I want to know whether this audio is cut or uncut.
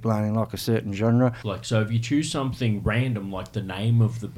cut